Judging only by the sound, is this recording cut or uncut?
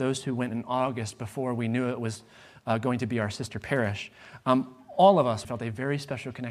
cut